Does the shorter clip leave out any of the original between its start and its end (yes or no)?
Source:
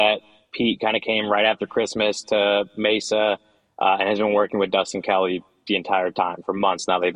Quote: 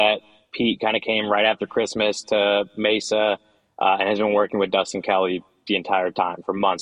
no